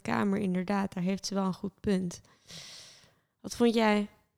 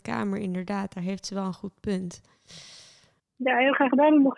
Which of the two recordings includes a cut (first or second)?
second